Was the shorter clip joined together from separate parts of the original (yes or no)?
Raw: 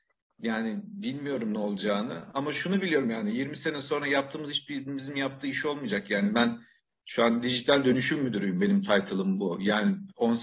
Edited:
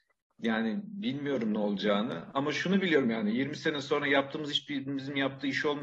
no